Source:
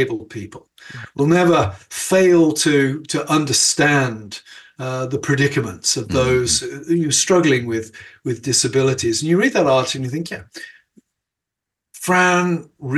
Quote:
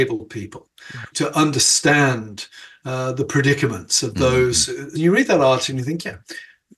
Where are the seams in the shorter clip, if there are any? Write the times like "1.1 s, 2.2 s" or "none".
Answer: 1.1 s, 5.0 s